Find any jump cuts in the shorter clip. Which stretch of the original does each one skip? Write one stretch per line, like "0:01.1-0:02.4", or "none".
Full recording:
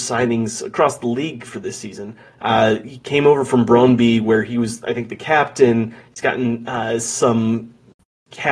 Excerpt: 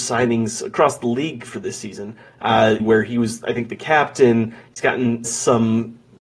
0:02.8-0:04.2
0:06.6-0:07.0